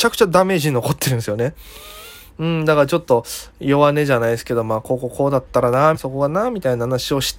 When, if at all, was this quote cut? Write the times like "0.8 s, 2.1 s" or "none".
5.9 s

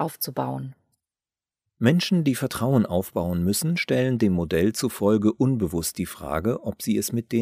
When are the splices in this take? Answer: none

